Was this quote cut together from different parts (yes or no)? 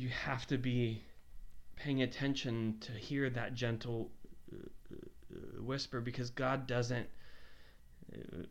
no